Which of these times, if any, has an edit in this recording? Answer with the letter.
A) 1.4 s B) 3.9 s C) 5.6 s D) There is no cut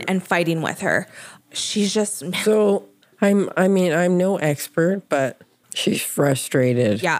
C